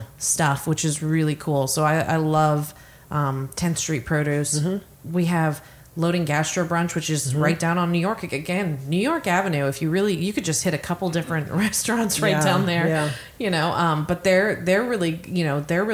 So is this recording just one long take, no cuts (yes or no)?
yes